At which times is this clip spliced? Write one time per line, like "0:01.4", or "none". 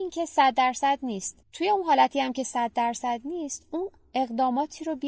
0:01.4